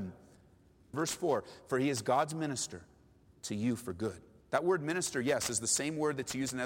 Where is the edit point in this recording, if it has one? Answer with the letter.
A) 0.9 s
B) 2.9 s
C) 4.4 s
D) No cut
A